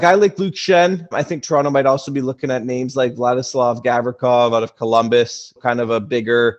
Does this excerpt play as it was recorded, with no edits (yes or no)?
no